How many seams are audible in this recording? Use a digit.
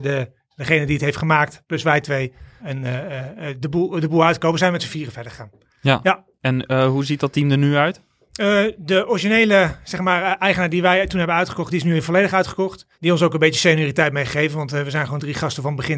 2